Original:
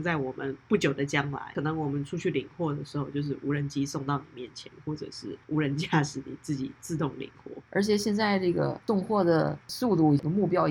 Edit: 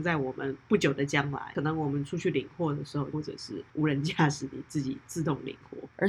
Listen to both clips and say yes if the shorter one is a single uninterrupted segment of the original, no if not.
no